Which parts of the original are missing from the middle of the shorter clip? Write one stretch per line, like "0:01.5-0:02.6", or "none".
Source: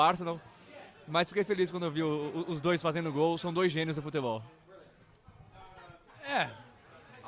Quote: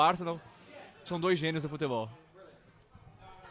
0:01.1-0:03.4

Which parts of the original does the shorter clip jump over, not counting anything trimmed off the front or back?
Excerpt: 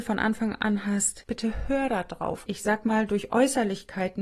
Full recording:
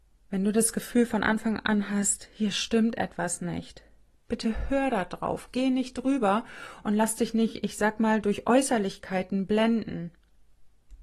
0:02.3-0:04.2
0:05.5-0:07.6

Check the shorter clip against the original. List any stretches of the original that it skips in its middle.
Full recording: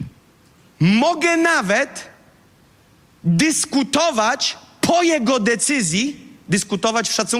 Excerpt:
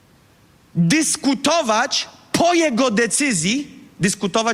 none

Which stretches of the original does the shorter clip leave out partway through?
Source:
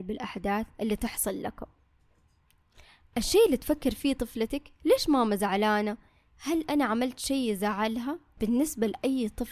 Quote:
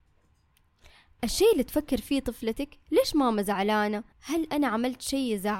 0:06.1-0:06.3

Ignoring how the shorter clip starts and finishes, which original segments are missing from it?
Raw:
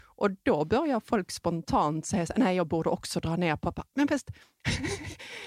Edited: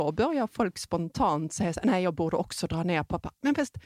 none

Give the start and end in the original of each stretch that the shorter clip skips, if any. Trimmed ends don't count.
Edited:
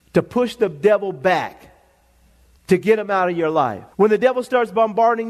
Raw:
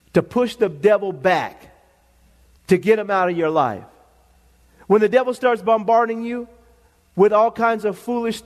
0:03.9-0:04.8

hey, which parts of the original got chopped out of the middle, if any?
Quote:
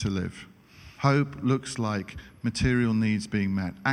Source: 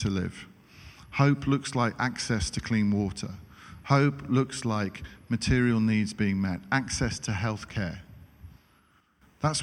0:01.0-0:03.8

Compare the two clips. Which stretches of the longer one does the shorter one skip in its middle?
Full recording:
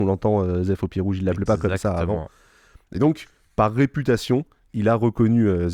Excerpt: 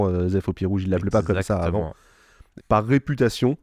0:02.9-0:03.4

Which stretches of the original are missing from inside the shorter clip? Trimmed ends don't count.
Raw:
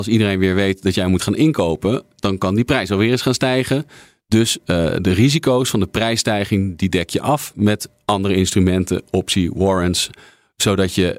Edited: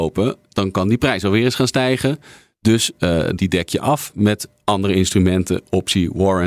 0:05.0-0:06.8

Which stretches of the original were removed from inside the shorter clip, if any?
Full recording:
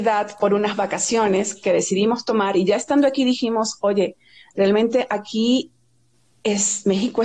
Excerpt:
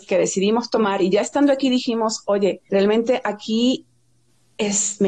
0:04.2-0:04.5

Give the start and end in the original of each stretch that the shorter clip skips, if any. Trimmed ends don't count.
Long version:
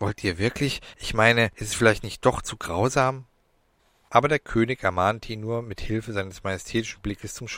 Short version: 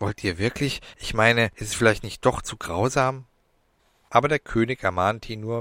none

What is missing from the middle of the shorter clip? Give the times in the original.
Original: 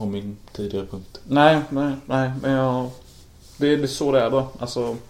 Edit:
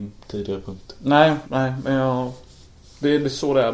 0:01.7-0:02.0

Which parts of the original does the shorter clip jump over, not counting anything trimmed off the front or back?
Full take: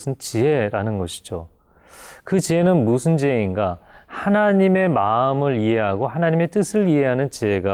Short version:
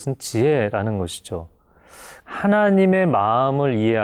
0:02.2-0:04.0

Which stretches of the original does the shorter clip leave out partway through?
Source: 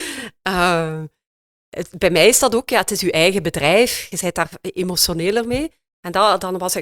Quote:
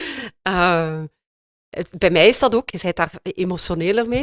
0:02.7-0:04.1

